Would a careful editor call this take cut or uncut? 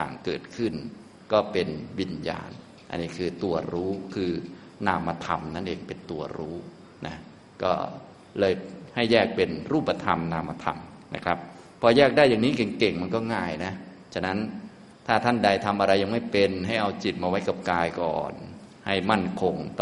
uncut